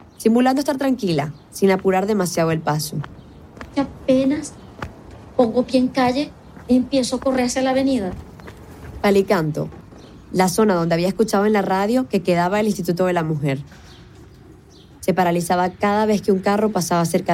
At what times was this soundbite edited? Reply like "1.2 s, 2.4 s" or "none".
9.0 s, 15.0 s